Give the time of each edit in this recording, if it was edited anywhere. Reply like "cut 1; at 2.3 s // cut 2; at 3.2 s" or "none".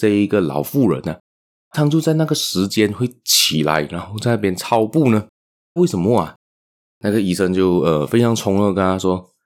cut 1; at 1.7 s // cut 2; at 5.8 s

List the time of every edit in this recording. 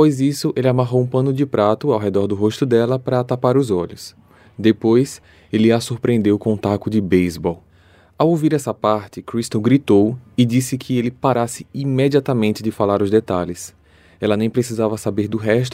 none

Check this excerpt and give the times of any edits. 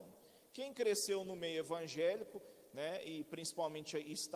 none

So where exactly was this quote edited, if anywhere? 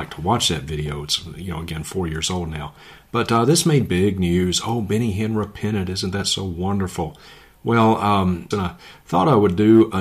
cut 1; at 8.5 s

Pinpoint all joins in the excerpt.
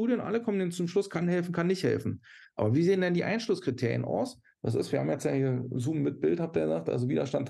none

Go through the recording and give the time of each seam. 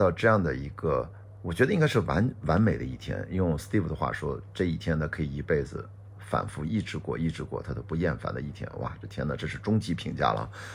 none

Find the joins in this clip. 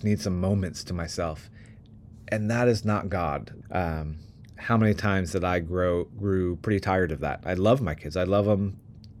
cut 1; at 3.6 s

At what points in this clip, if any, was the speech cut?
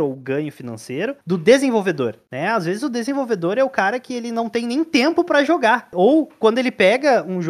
none

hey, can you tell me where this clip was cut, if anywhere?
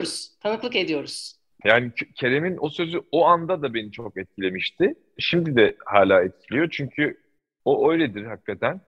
cut 1; at 1.6 s // cut 2; at 5.2 s

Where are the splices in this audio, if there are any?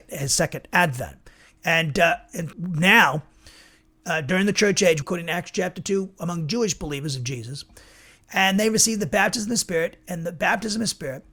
cut 1; at 2.5 s // cut 2; at 5.0 s

